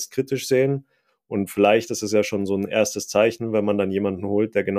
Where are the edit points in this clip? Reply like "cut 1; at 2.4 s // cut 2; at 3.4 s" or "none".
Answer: none